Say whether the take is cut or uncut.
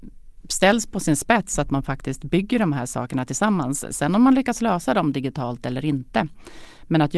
uncut